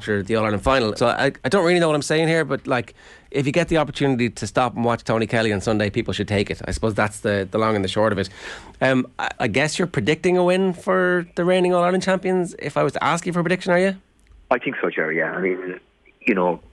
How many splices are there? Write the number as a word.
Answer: two